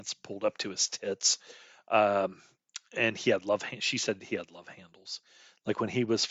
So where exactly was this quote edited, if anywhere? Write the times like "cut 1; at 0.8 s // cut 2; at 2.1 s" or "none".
none